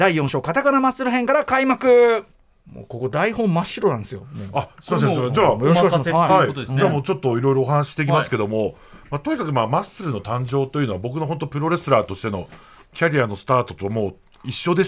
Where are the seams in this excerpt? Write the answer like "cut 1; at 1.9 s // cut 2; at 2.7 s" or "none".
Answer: none